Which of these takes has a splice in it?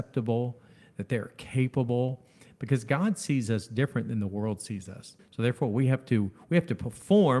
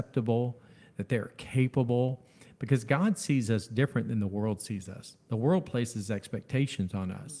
first; 1 cut; at 5.2 s

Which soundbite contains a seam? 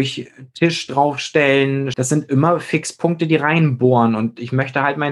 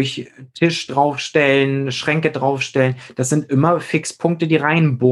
first; 1 cut; at 1.9 s

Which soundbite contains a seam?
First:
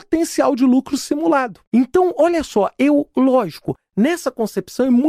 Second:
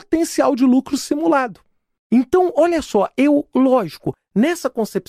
first; 1 cut; at 1.6 s

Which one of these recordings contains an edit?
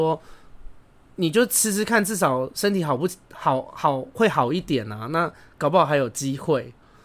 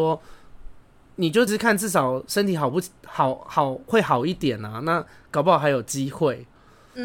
second; 1 cut; at 1.5 s

